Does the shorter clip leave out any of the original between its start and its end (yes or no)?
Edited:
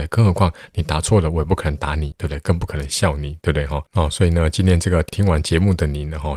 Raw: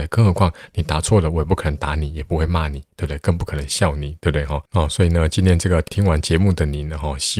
yes